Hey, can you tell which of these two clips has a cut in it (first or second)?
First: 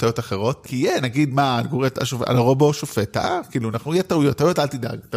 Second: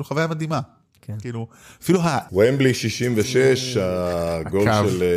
second